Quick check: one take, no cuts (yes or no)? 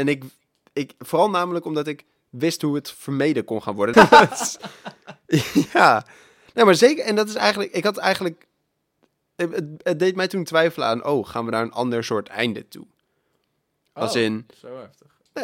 no